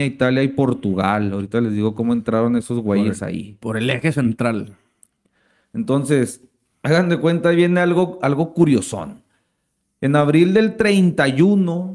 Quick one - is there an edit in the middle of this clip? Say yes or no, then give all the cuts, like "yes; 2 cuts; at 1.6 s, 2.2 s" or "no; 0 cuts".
no; 0 cuts